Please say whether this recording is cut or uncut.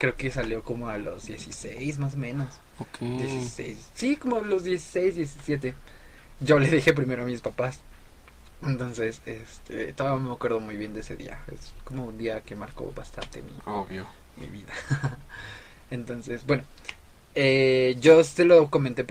uncut